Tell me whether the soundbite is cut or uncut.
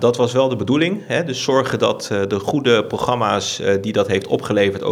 uncut